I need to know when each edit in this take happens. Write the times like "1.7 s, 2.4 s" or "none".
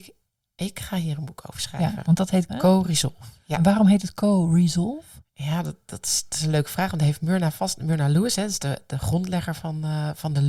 2.5 s

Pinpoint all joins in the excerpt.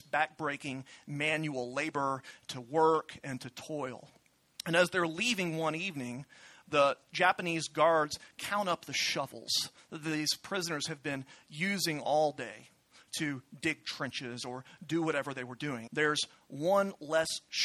15.9 s

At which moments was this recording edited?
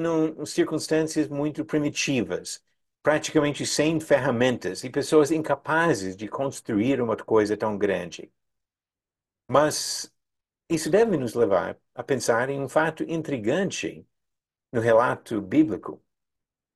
none

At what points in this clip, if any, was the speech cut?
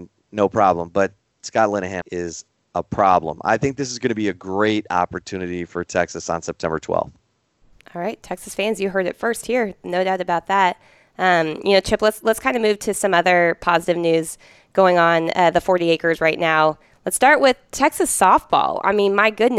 2.0 s

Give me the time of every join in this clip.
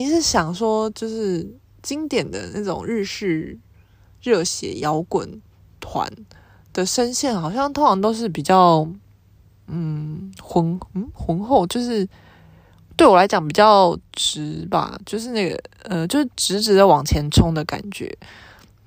none

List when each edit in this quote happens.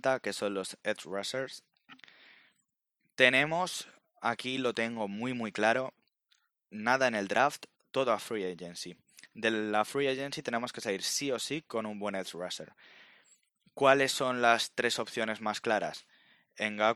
none

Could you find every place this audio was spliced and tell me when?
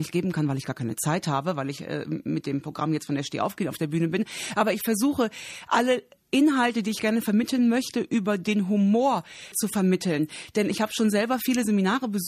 9.5 s

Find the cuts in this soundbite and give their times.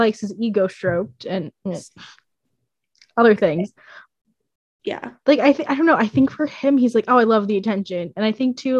none

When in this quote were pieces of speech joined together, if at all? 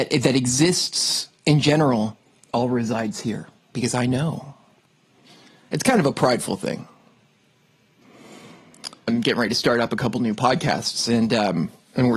9.1 s

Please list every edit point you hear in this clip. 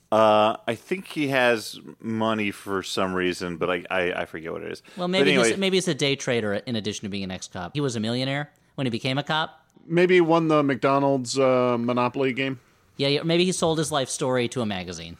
7.7 s

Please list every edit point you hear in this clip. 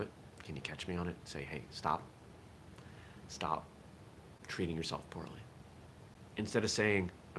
6.3 s

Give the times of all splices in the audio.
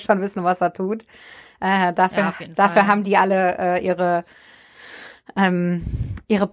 none

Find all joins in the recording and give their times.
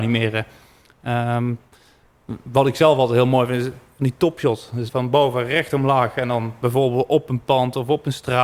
4.9 s

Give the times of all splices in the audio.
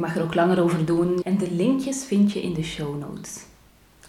1.2 s

